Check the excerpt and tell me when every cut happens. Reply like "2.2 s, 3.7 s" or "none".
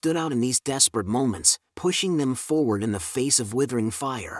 1.7 s